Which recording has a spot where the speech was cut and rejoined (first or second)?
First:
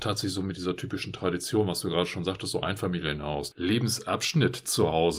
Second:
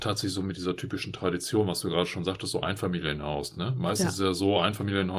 first